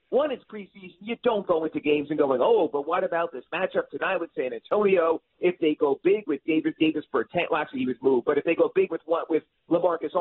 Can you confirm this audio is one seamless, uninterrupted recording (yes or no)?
yes